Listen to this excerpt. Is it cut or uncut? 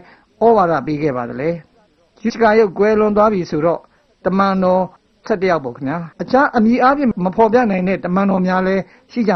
cut